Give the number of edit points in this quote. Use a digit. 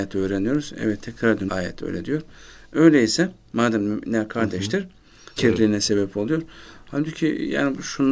2